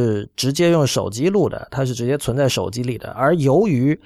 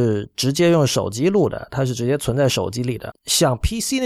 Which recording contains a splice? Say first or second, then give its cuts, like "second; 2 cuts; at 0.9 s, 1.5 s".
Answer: second; 1 cut; at 3.1 s